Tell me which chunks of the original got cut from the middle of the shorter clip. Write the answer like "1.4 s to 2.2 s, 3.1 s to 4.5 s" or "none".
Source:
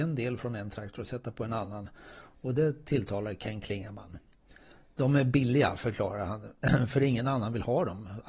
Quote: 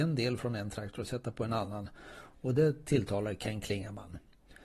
none